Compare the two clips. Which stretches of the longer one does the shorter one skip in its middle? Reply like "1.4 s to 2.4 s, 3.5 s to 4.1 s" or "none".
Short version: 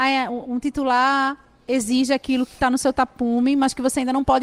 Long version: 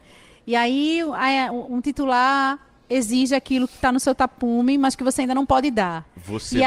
none